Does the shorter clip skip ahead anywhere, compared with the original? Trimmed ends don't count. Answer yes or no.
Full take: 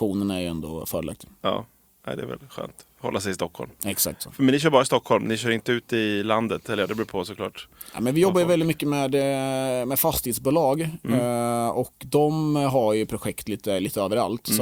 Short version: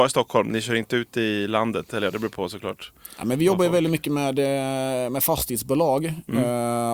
no